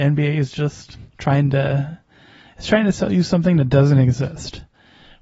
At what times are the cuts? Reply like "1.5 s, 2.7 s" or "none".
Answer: 1.1 s